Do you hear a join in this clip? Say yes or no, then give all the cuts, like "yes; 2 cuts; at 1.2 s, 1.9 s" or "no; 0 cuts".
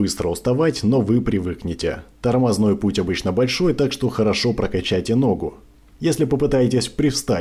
yes; 1 cut; at 2.1 s